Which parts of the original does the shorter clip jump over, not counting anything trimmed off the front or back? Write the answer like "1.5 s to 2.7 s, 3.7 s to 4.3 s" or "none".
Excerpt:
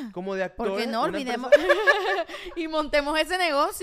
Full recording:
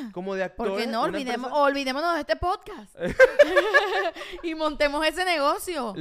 1.5 s to 3.4 s